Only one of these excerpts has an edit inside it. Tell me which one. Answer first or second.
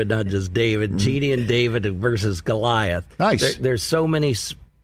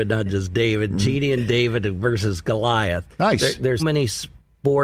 second